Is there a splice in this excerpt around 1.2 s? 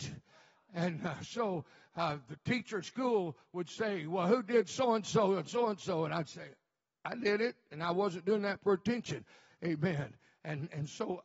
no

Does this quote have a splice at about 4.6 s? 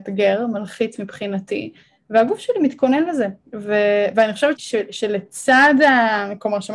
yes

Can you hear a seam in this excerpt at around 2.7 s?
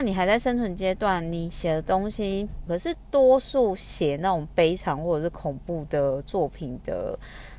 yes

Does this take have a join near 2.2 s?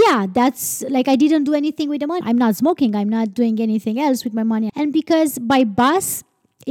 yes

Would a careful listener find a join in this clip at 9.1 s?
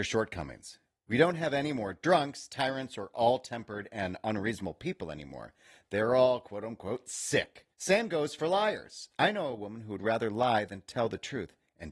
no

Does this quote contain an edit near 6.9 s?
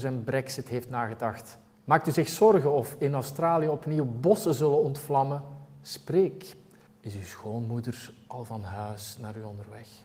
yes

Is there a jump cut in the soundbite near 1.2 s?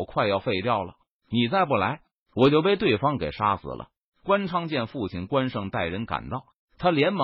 no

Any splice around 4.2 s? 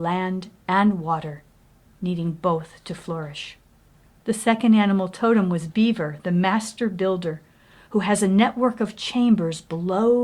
yes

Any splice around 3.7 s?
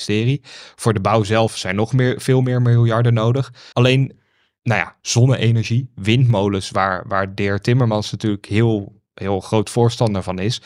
yes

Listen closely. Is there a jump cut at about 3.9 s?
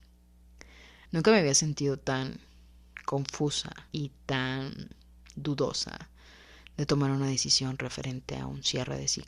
yes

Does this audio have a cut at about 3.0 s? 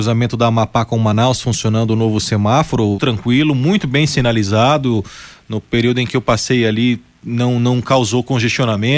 yes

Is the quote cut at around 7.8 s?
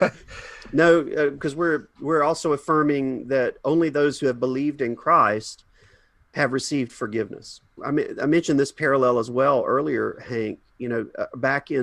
yes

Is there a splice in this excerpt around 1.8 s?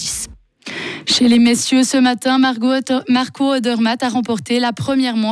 no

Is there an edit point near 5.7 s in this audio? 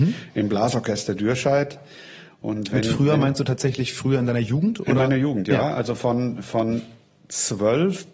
no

